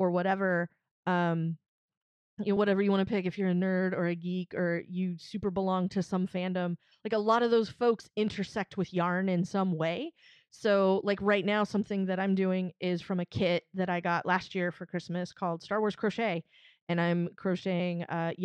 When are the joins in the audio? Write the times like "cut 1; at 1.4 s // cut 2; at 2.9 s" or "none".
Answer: none